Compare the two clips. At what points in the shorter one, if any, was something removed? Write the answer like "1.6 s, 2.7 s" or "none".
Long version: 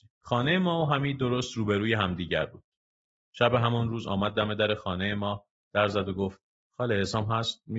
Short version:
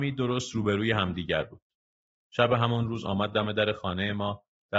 none